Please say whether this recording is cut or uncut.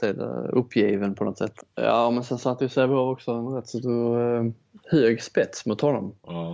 cut